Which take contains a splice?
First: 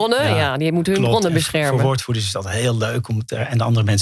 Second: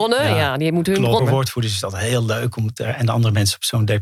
second; 1 cut; at 1.2 s

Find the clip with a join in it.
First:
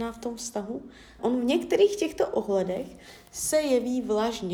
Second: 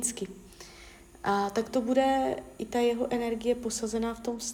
first; 1 cut; at 1.2 s

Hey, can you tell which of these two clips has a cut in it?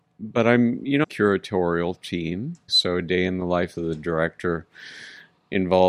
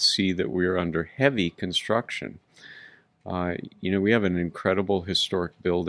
first; 2 cuts; at 1.0 s, 2.7 s

